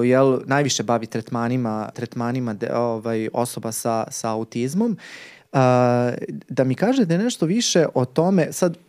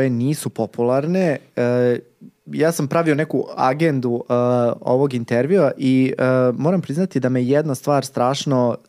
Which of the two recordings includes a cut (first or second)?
first